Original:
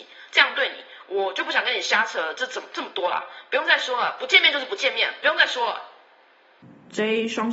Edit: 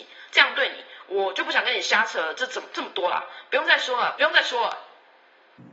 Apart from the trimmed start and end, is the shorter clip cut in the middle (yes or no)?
yes